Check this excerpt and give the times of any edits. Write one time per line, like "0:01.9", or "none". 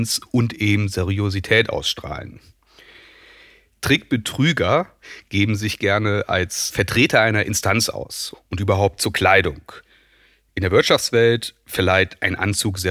0:06.7
0:08.3